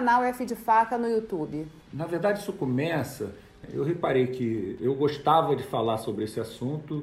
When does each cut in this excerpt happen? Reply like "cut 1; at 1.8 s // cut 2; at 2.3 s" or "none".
none